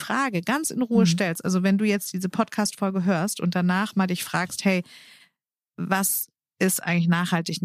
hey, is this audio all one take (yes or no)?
yes